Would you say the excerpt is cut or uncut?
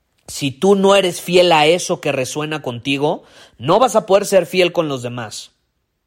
uncut